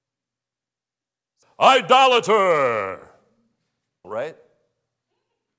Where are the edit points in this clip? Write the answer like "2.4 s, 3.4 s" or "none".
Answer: 1.4 s, 4.0 s